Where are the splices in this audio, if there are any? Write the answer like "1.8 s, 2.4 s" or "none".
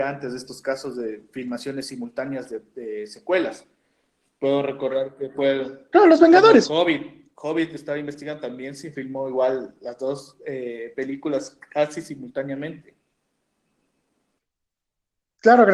none